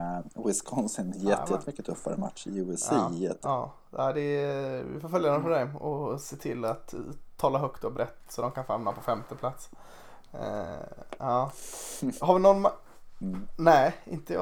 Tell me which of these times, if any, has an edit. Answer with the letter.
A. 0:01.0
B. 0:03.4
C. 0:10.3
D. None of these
B